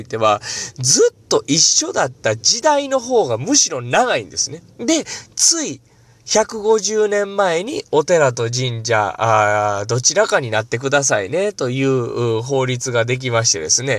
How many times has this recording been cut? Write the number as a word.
one